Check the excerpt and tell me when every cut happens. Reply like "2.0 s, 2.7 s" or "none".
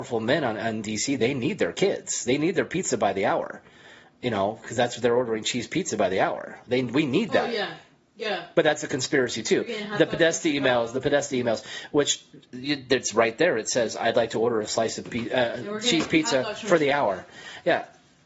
none